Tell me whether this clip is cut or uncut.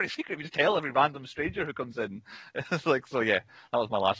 uncut